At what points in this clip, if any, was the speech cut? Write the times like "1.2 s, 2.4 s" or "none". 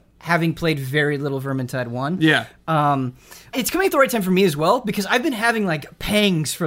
3.5 s